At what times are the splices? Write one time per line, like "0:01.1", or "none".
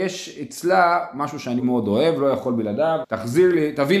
0:01.6
0:03.0